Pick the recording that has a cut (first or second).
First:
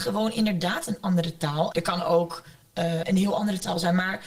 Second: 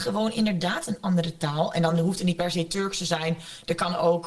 first